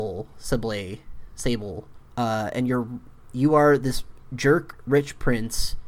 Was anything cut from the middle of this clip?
yes; 1 cut; at 2.1 s

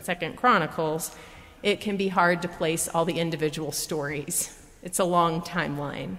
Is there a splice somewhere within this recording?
no; 0 cuts

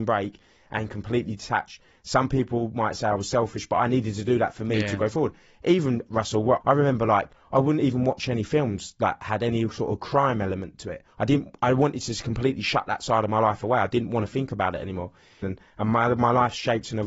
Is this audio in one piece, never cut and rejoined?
no; 2 cuts; at 6.6 s, 15.4 s

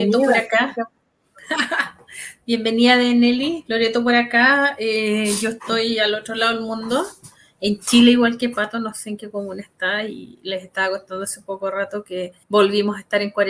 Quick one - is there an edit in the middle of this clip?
yes; 1 cut; at 12.4 s

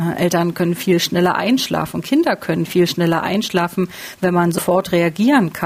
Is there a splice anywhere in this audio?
no; 0 cuts

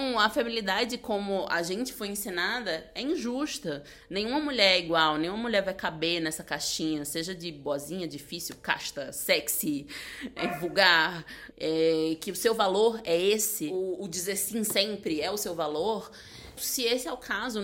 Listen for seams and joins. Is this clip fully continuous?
no; 2 cuts; at 11.5 s, 16.6 s

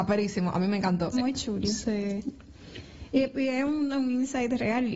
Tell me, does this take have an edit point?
yes; 1 cut; at 1.1 s

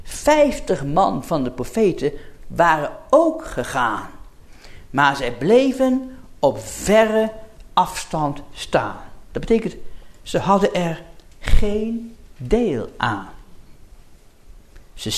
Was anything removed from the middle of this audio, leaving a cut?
no; 0 cuts

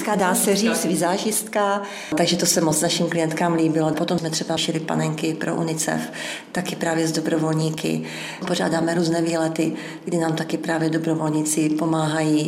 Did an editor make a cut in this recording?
no; 0 cuts

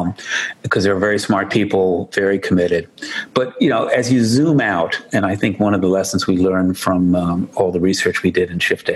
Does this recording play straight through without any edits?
yes; 0 cuts

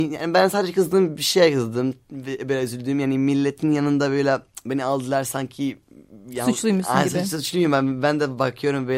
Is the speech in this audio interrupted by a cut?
no; 0 cuts

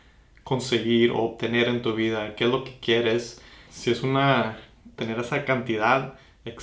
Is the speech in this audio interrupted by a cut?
yes; 2 cuts; at 3.7 s, 5.0 s

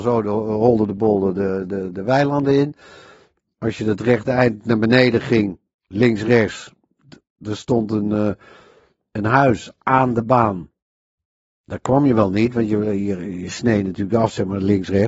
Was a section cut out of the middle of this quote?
no; 0 cuts

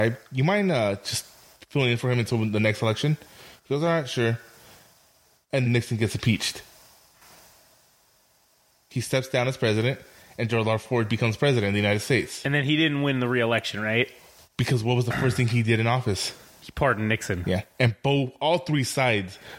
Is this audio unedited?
no; 2 cuts; at 5.7 s, 17.4 s

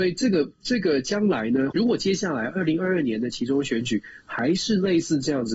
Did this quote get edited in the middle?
yes; 1 cut; at 1.7 s

